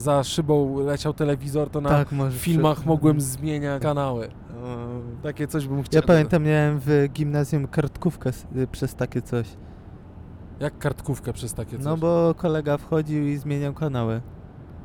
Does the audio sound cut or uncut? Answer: cut